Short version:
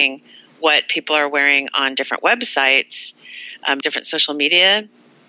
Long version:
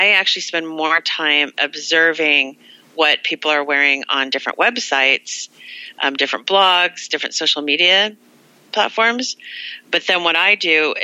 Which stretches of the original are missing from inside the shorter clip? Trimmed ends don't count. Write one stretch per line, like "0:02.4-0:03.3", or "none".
0:06.2-0:07.1